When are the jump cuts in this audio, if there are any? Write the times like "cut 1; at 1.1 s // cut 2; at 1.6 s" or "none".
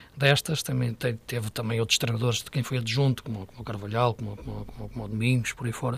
none